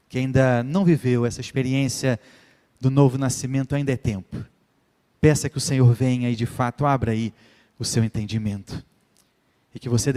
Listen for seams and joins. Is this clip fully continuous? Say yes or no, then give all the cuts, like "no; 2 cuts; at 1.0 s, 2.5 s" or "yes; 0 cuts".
yes; 0 cuts